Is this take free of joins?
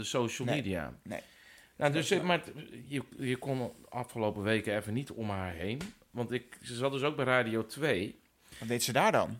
yes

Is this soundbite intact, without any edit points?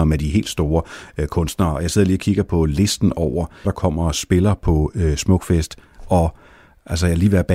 no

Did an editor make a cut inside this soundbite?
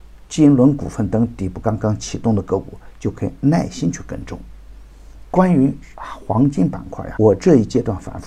yes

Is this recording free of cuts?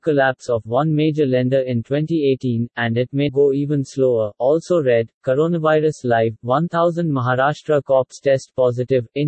no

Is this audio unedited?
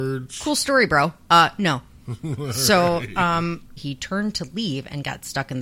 no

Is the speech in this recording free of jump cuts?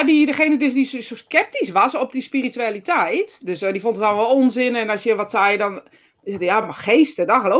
yes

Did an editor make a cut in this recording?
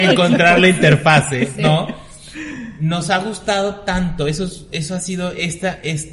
no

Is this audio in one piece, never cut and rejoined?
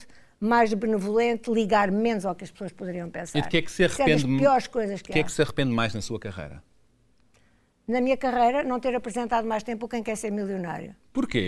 yes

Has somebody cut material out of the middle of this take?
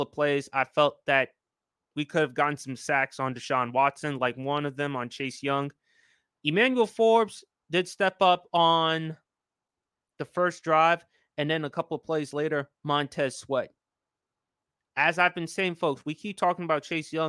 no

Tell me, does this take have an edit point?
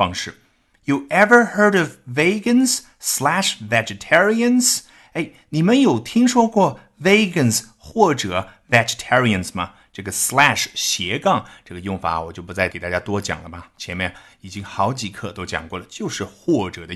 no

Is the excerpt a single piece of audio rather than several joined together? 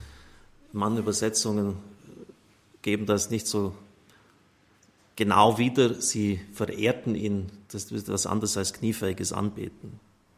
yes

